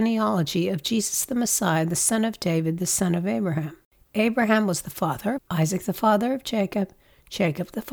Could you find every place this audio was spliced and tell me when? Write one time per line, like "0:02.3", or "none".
0:05.4